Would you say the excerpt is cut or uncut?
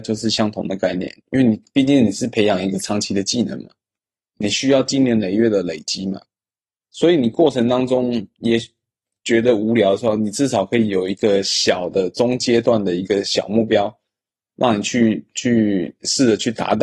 uncut